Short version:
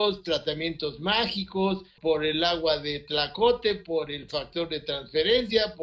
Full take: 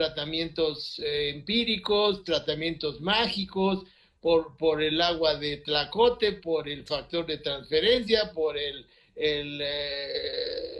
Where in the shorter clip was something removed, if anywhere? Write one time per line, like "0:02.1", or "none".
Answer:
0:02.0

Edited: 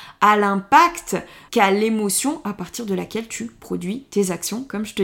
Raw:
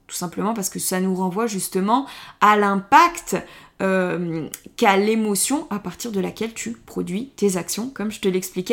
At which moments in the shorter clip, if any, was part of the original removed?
0:01.5

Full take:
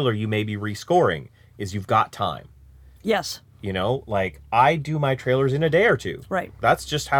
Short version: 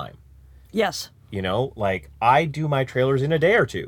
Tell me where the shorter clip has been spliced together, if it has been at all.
none

